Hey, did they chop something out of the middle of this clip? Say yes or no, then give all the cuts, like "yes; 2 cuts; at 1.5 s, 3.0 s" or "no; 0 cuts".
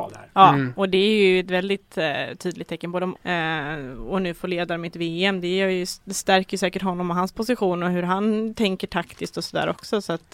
yes; 1 cut; at 3.2 s